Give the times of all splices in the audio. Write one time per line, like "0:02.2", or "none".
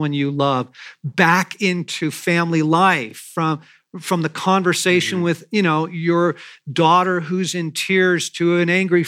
none